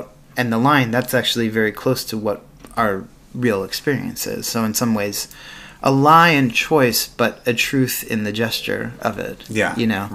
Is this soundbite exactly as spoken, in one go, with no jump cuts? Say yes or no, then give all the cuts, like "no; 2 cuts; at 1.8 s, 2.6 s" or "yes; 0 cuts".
yes; 0 cuts